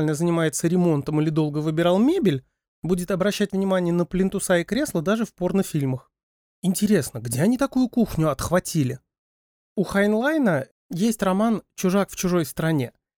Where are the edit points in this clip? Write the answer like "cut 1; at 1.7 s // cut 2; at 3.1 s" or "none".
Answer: cut 1; at 9.6 s // cut 2; at 10.8 s